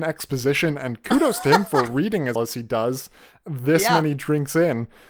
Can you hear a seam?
yes; 1 cut; at 2.4 s

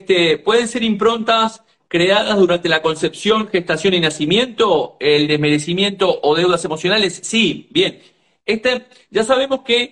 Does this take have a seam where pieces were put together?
no; 0 cuts

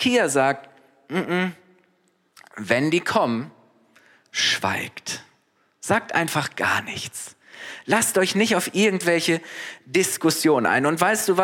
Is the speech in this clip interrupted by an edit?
no; 0 cuts

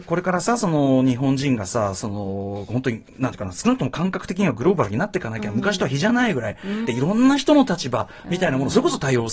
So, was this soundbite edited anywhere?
yes; 1 cut; at 6.8 s

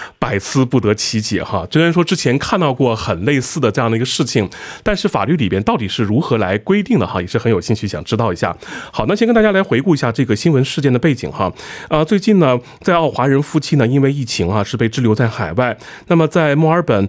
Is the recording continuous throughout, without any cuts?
yes; 0 cuts

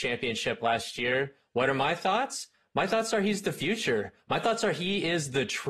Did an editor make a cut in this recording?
no; 0 cuts

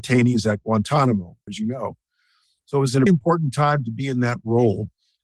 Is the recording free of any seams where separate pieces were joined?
no; 2 cuts; at 1.5 s, 3.1 s

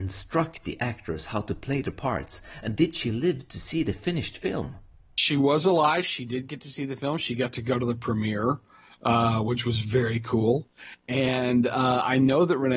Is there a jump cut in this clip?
no; 0 cuts

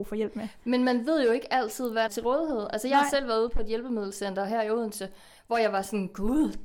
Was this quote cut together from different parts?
yes; 1 cut; at 2.1 s

